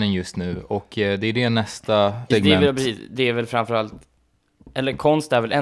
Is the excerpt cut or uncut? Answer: cut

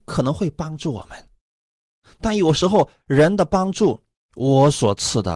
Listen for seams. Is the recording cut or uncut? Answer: cut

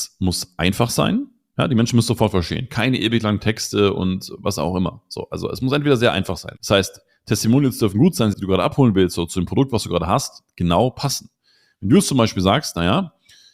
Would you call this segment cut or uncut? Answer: cut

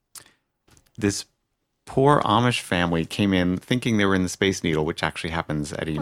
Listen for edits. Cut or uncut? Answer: uncut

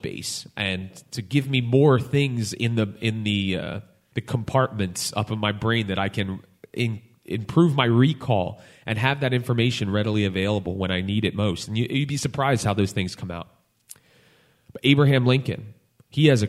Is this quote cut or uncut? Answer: uncut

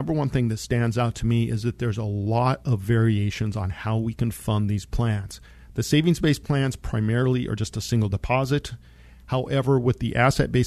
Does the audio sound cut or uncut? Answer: uncut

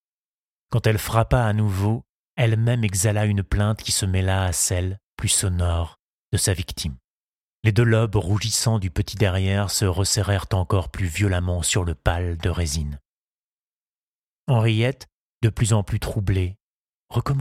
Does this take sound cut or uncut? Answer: uncut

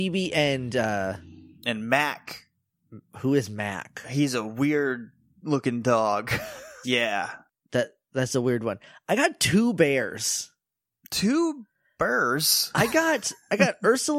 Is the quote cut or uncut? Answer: cut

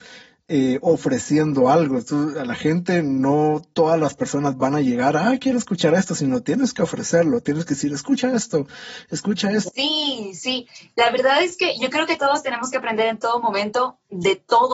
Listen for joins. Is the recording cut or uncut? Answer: cut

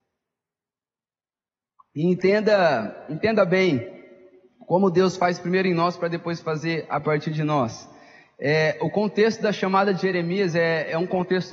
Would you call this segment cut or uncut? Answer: uncut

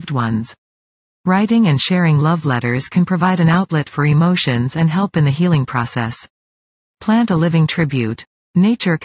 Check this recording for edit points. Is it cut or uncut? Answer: uncut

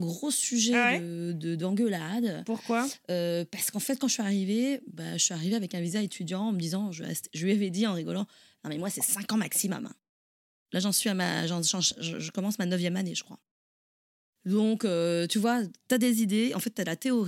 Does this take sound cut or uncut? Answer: uncut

